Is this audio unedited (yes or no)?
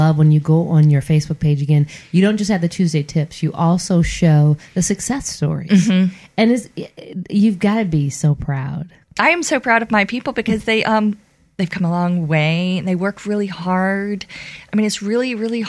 yes